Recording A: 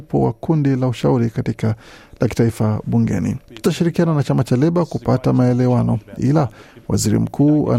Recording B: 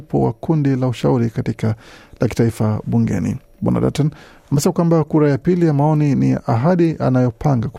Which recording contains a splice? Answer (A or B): A